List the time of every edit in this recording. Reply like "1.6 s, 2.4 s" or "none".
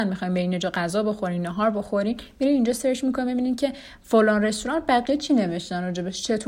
none

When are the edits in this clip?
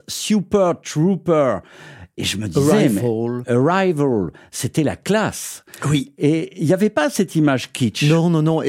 none

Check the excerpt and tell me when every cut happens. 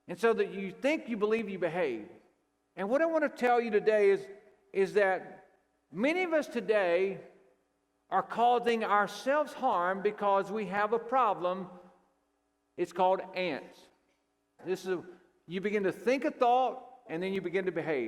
14.6 s, 17.1 s

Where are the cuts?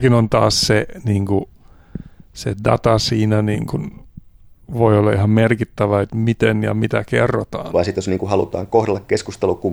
6.1 s, 7.7 s

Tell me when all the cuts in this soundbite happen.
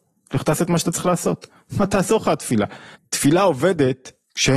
2.9 s

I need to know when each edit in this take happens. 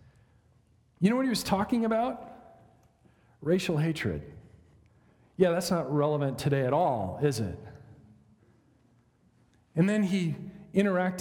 none

